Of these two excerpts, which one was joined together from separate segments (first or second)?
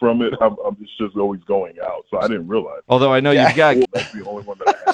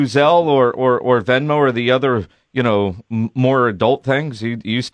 first